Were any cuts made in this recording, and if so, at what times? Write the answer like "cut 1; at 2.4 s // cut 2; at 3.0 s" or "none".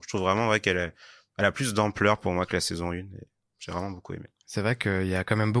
none